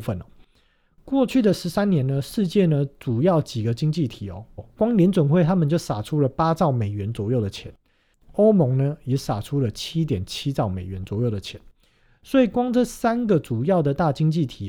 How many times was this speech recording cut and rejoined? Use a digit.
2